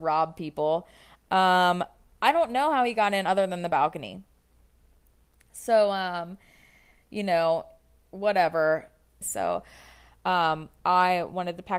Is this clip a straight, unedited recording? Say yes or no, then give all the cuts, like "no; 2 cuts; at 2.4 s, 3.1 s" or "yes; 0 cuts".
no; 1 cut; at 9.2 s